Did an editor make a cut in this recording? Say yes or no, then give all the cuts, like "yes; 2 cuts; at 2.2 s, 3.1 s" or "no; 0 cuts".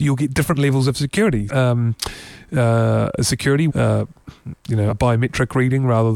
yes; 3 cuts; at 1.5 s, 3.7 s, 4.9 s